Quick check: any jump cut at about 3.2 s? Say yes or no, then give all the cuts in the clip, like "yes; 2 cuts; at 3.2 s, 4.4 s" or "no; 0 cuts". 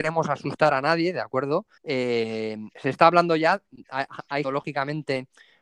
no; 2 cuts; at 1.8 s, 4.4 s